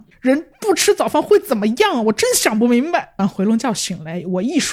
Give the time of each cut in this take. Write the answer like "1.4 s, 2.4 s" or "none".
3.2 s